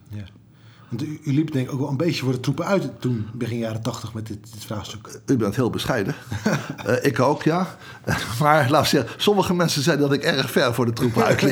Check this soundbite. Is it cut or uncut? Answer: uncut